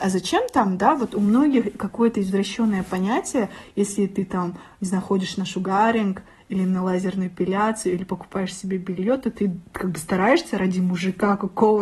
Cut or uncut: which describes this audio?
uncut